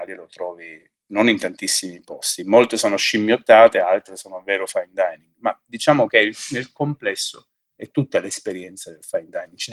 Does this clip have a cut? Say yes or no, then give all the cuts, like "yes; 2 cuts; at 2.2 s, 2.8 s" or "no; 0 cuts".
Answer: no; 0 cuts